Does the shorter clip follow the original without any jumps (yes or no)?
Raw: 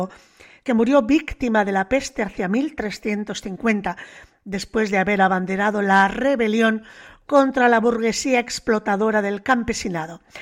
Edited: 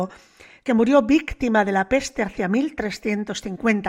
yes